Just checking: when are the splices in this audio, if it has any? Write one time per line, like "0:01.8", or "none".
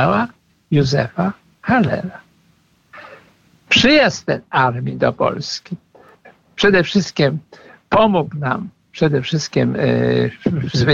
0:03.7